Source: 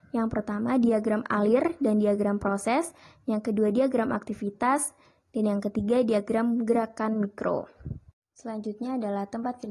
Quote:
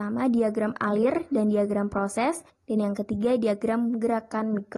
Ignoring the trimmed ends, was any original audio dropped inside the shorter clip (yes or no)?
yes